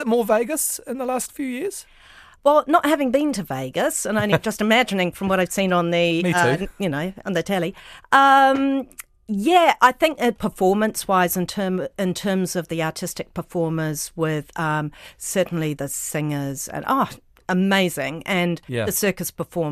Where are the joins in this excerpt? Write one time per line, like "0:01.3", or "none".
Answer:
0:15.7